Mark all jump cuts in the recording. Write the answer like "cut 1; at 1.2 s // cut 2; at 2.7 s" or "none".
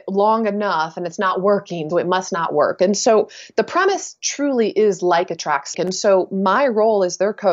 cut 1; at 1.9 s // cut 2; at 5.7 s